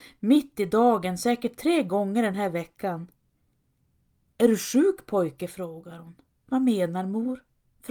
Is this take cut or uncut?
cut